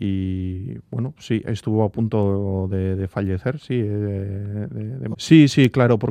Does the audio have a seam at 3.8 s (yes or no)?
no